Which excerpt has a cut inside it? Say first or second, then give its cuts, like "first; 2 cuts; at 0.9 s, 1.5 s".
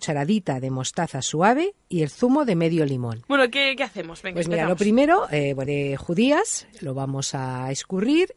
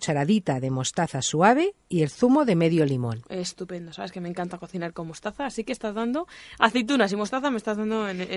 first; 3 cuts; at 3.2 s, 5.7 s, 6.7 s